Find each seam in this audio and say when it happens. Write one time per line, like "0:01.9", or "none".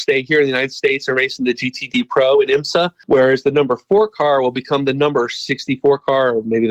none